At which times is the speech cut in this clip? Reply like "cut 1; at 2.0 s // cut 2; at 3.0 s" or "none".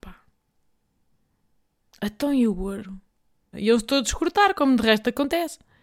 cut 1; at 3.5 s